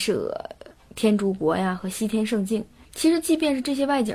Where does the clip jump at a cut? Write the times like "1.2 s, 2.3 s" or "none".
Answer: 2.9 s